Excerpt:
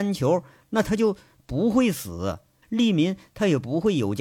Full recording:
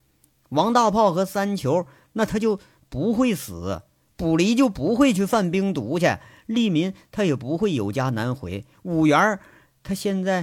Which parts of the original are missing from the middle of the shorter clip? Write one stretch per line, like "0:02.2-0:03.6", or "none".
0:04.1-0:06.4